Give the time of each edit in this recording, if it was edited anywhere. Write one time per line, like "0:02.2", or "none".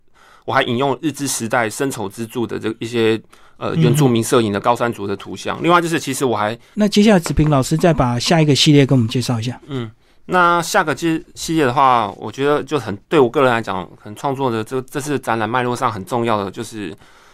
0:06.7